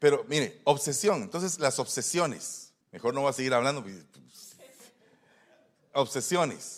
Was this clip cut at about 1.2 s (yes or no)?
no